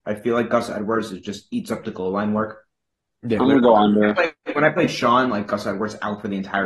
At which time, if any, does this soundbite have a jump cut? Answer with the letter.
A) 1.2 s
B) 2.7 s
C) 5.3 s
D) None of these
D